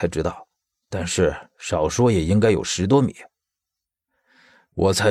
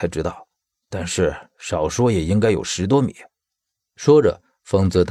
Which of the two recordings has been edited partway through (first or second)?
second